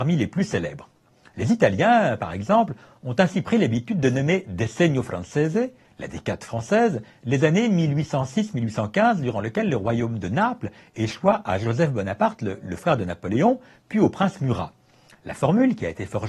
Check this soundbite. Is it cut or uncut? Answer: uncut